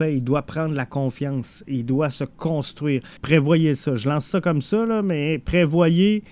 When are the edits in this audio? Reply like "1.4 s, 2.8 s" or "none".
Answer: 3.2 s